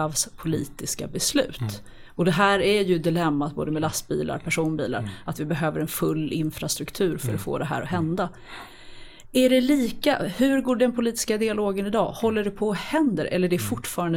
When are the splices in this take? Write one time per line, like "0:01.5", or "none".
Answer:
none